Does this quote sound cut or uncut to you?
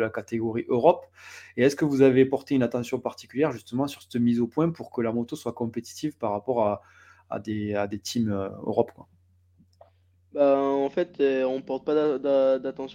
uncut